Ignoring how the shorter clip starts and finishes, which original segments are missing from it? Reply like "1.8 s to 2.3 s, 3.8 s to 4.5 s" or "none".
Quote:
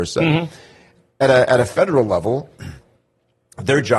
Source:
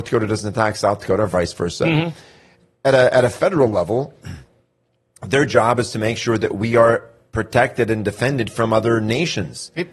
none